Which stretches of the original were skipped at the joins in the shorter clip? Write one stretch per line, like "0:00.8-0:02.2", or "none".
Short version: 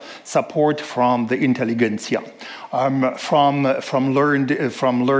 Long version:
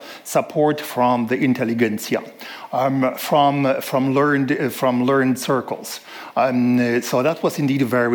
none